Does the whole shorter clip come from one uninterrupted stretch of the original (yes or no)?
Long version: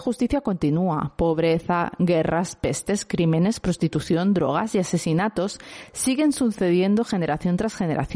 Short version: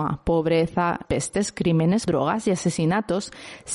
no